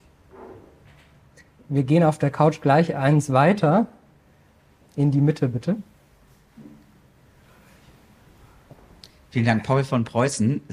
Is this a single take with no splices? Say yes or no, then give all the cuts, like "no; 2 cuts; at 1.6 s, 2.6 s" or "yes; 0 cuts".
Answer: yes; 0 cuts